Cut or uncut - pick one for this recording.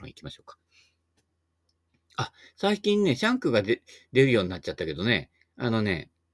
uncut